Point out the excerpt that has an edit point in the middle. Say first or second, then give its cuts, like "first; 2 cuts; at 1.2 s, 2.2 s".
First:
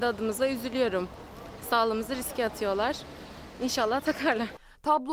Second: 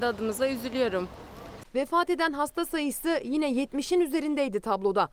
second; 1 cut; at 1.6 s